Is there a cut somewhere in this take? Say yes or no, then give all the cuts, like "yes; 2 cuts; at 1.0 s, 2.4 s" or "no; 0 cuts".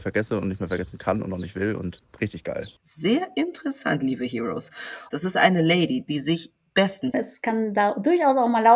yes; 3 cuts; at 2.8 s, 5.1 s, 7.1 s